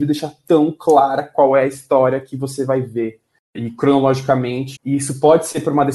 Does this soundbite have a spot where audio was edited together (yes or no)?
yes